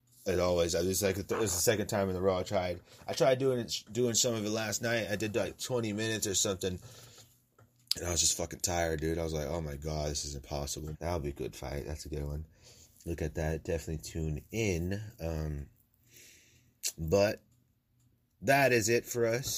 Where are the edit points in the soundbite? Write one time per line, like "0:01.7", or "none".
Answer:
0:10.9